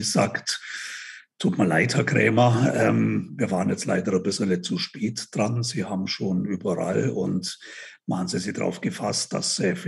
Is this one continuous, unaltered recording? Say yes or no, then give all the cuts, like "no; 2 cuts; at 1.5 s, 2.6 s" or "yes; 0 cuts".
yes; 0 cuts